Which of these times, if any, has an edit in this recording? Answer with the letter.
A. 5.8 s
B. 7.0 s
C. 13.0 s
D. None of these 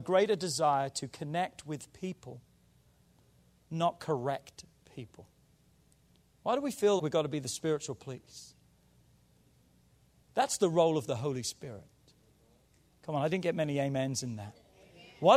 B